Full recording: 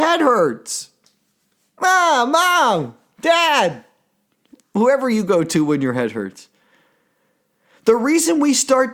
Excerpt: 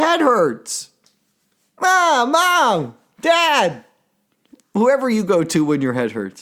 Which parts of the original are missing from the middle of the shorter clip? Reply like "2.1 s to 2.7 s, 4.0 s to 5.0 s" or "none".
none